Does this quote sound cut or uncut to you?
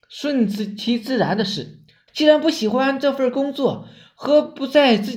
cut